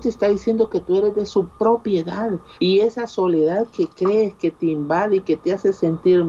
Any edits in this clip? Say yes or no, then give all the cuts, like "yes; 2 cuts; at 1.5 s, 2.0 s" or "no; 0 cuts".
yes; 1 cut; at 2.6 s